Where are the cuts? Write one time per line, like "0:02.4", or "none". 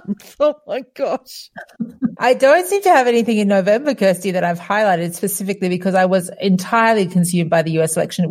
0:02.2

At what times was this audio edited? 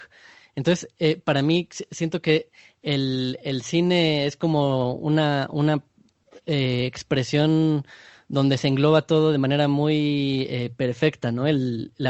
none

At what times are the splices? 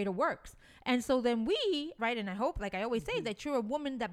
0:02.0

